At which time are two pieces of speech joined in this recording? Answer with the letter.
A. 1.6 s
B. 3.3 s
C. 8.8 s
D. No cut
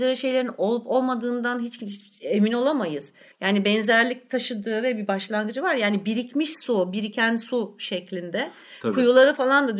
B